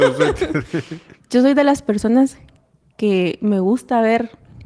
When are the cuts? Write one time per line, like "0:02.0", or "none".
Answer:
0:01.1